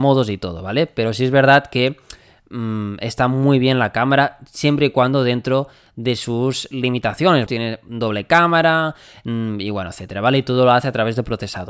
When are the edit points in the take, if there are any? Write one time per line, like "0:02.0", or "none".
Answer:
0:07.5
0:09.9